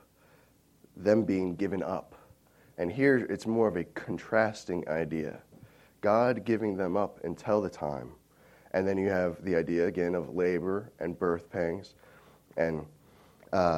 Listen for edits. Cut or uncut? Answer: uncut